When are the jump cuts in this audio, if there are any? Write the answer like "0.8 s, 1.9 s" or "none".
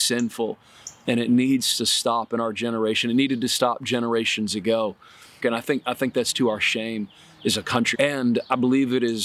5.4 s, 7.9 s